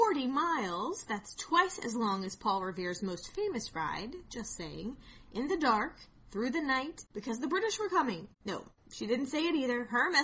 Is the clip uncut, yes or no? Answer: no